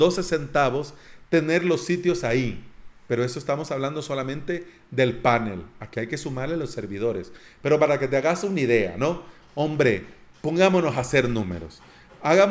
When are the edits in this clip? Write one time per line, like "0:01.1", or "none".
0:09.4

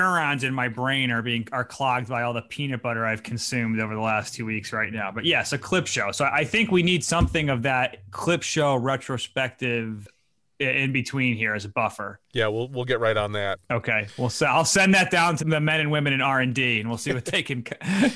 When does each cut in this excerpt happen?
0:13.6
0:15.4

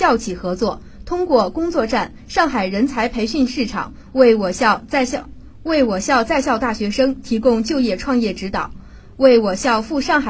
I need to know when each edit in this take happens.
none

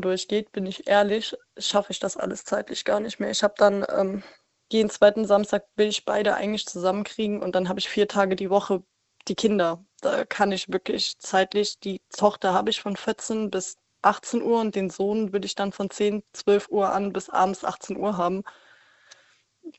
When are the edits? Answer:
none

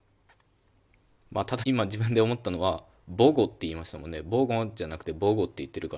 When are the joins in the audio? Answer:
0:01.6

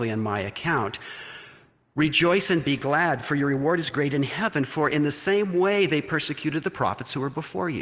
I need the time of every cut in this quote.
none

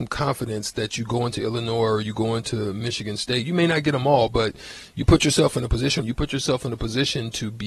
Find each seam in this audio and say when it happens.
0:06.0

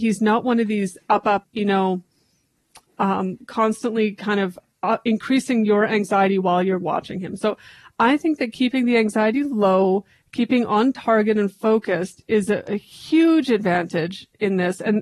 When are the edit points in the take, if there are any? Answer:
0:01.4

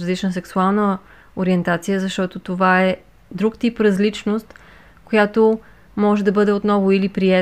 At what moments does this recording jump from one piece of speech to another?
none

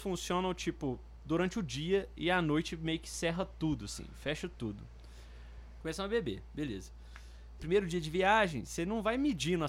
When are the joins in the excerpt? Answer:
0:05.8
0:07.6

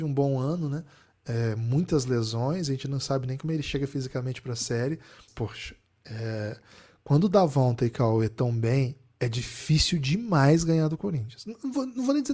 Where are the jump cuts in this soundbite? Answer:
0:05.3

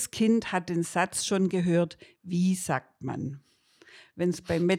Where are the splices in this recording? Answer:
none

